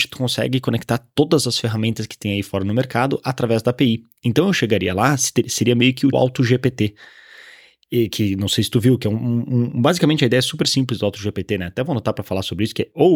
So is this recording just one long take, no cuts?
no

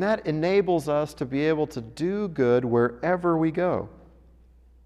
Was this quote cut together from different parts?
no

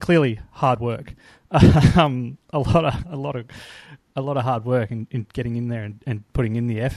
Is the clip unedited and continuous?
yes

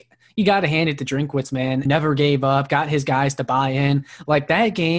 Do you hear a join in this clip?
yes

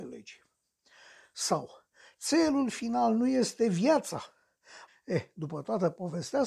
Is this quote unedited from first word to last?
no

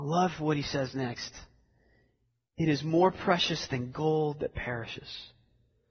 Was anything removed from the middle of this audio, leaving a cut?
no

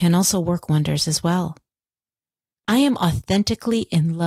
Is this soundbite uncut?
no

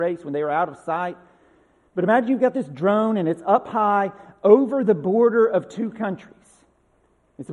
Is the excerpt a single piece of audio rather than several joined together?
yes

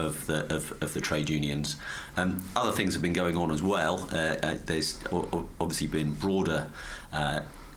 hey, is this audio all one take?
no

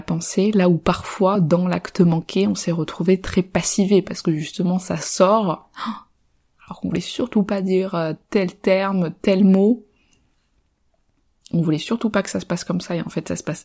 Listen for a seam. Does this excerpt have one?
no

